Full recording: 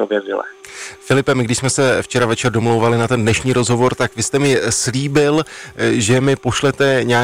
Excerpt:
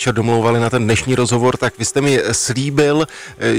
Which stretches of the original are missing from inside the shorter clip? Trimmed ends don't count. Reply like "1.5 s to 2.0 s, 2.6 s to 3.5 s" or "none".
none